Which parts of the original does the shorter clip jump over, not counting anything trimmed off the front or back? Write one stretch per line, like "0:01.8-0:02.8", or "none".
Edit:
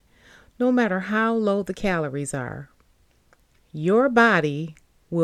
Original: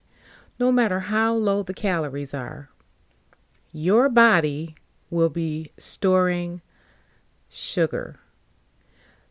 none